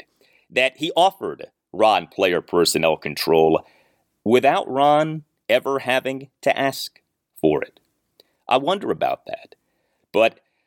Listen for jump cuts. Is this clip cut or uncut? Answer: uncut